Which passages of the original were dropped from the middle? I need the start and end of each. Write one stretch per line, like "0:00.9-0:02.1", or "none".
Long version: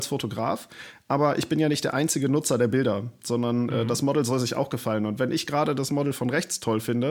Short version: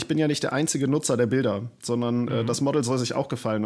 none